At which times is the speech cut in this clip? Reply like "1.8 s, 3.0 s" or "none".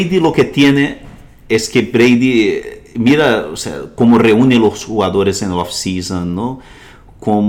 none